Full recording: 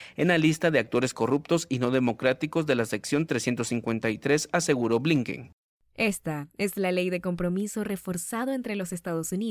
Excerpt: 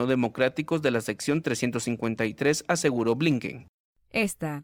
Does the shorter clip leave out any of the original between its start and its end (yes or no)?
no